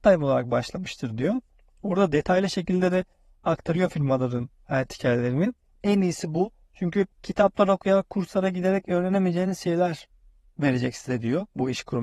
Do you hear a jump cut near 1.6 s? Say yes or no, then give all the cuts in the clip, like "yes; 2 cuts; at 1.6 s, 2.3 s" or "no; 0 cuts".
no; 2 cuts; at 5.8 s, 7.1 s